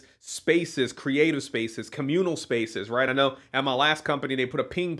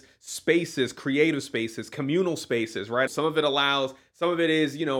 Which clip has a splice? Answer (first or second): second